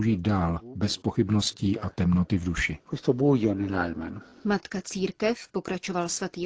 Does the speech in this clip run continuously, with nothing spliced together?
yes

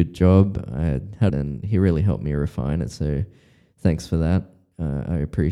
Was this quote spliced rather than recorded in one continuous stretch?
yes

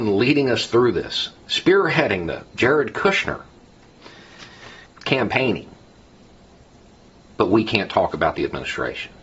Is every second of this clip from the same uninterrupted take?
no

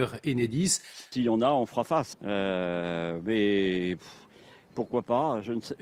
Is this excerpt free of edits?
no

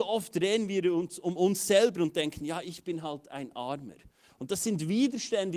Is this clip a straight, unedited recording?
yes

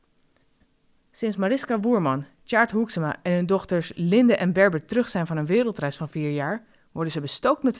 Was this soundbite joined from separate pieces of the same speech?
no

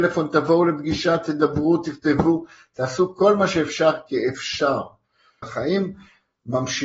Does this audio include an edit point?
yes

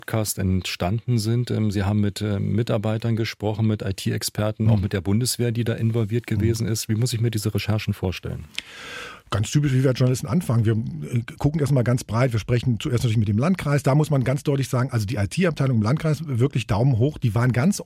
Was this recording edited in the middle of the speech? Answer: no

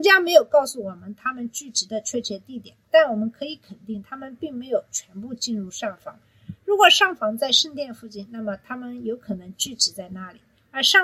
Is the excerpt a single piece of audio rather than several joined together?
yes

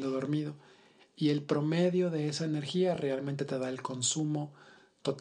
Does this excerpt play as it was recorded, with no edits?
yes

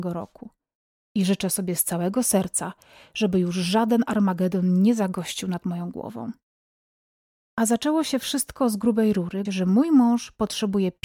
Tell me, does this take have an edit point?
yes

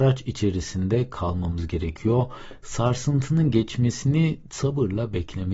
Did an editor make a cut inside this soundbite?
no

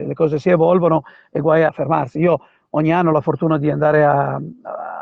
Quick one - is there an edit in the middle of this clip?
yes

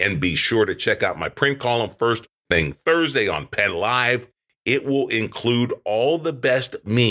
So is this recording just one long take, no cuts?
yes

